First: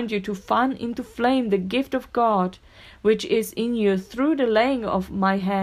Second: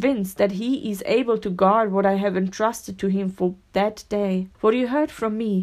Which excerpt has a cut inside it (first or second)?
second